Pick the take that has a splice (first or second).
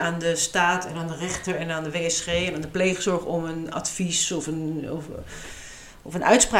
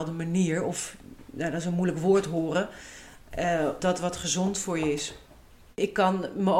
second